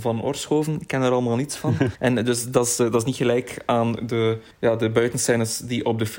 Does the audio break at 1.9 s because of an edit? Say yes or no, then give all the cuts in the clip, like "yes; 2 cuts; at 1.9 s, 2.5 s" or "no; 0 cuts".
yes; 2 cuts; at 1.9 s, 4.5 s